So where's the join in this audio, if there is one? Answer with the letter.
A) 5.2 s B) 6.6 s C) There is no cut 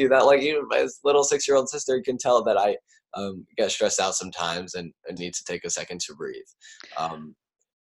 A